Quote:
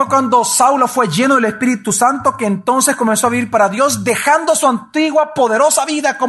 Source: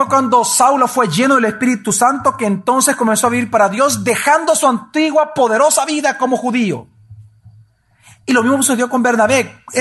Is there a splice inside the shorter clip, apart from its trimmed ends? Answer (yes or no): no